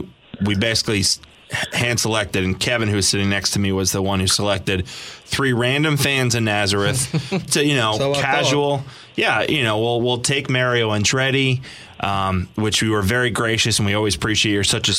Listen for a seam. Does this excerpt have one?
yes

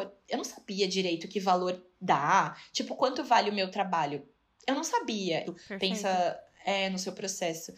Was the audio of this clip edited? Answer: yes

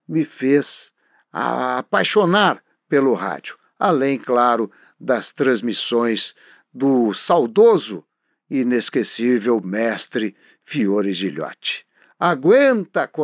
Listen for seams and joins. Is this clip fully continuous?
yes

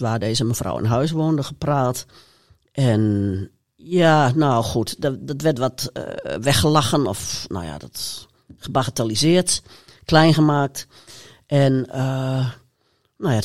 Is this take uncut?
yes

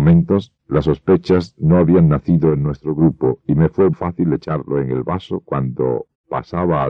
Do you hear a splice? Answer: yes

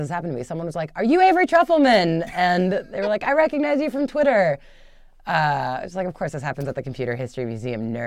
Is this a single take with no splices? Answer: yes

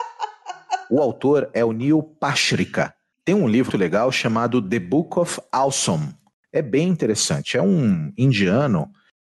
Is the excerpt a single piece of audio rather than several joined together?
no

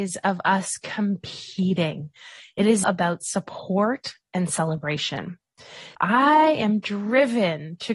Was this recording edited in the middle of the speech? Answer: yes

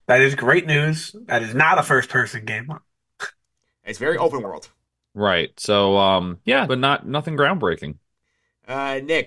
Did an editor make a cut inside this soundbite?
yes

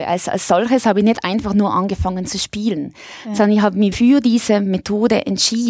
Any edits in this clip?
yes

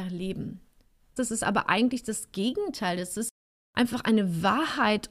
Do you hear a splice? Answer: yes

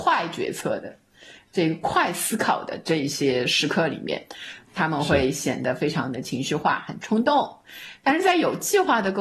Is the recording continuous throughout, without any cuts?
yes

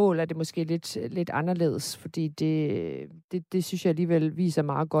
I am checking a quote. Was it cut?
yes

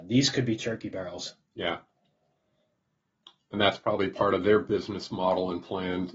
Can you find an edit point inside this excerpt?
no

